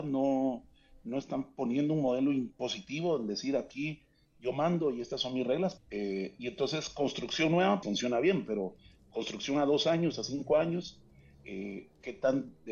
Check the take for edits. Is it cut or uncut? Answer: cut